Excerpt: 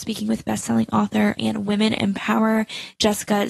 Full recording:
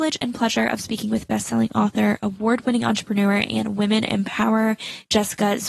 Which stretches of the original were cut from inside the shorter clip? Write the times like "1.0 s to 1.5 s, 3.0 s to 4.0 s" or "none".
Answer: 2.2 s to 3.5 s